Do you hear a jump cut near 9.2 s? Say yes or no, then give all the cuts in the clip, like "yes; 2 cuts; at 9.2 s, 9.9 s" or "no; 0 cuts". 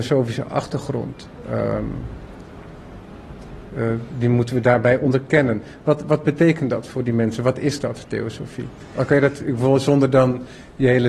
no; 1 cut; at 3.7 s